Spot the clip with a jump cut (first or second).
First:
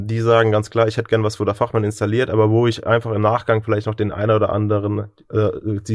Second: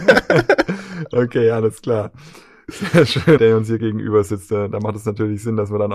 second